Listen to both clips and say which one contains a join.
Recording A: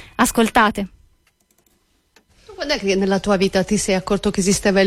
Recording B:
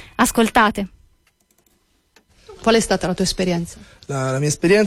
B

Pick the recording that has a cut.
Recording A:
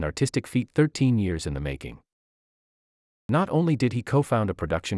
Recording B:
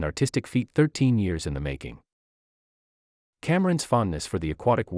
A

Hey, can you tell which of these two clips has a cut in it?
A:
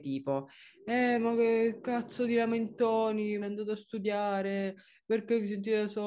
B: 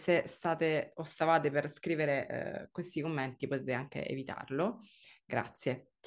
A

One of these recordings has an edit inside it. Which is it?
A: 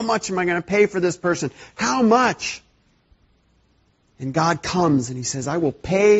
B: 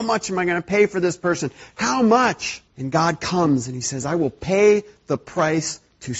B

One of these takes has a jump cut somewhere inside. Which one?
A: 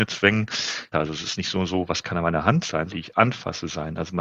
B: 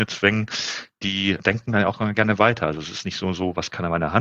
A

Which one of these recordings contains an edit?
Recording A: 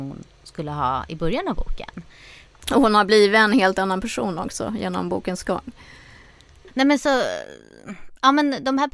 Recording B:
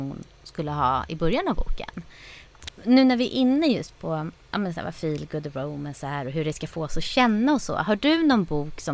B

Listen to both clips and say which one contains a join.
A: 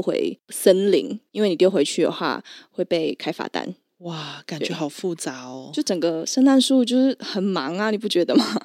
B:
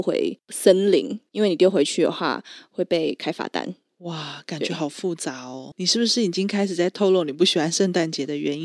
B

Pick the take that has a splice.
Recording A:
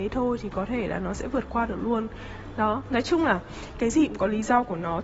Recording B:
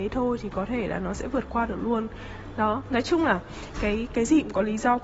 A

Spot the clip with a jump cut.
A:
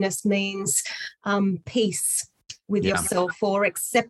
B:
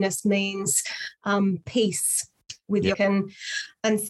B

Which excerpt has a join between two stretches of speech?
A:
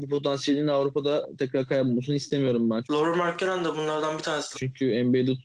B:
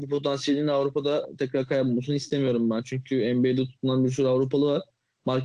A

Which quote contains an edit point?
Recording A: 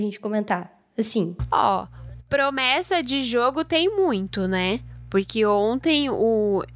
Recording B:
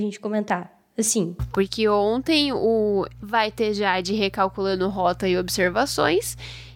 B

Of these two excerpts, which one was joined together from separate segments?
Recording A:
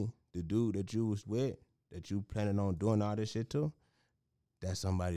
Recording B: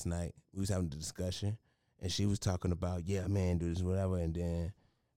A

